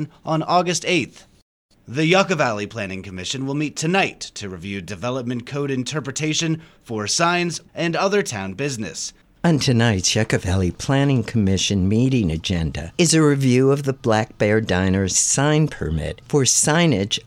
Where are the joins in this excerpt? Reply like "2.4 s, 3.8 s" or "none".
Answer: 7.7 s, 9.2 s